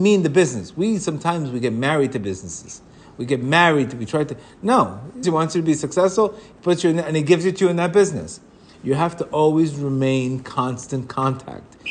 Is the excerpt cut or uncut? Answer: cut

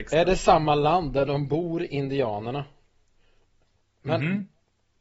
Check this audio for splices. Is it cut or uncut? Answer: uncut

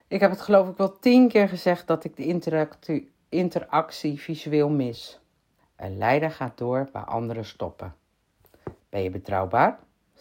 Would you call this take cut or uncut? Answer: cut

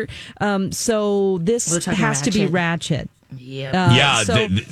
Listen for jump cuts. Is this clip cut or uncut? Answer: uncut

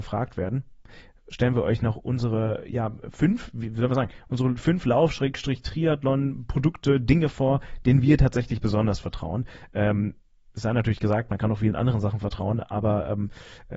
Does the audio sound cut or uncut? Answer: uncut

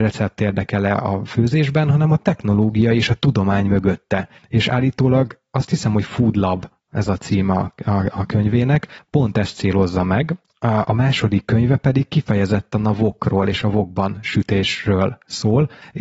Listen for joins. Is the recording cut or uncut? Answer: uncut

